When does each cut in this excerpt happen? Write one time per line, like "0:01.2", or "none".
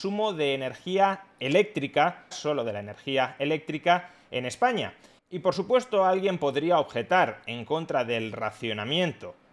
0:02.3
0:05.2